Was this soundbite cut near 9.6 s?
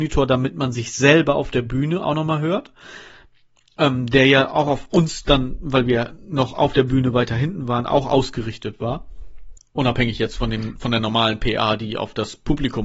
yes; 1 cut; at 9.6 s

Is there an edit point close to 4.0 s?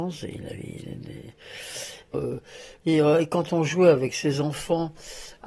no; 1 cut; at 2.1 s

